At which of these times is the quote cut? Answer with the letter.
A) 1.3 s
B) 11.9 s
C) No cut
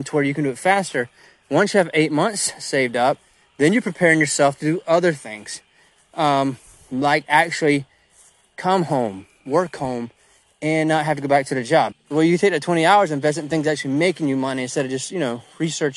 B